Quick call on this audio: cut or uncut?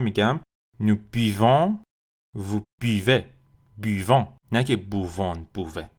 cut